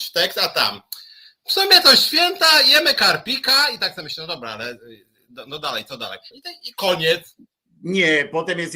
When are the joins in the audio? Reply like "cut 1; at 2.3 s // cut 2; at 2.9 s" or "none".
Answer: cut 1; at 6.3 s